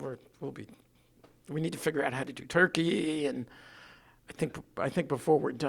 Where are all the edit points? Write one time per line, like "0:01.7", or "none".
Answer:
none